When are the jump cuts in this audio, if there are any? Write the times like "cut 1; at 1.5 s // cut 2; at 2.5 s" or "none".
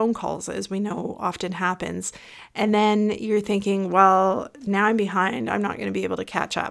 none